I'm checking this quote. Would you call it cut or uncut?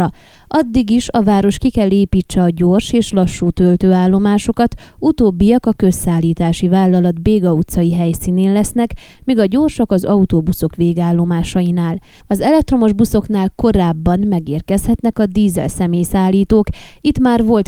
uncut